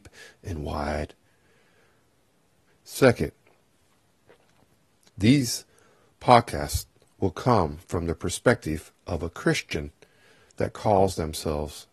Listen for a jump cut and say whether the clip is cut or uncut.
cut